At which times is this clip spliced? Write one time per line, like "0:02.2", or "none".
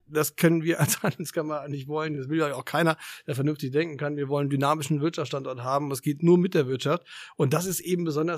none